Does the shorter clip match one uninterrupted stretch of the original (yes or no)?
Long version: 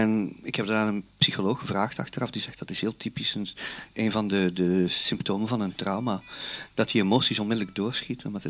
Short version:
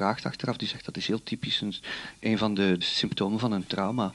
no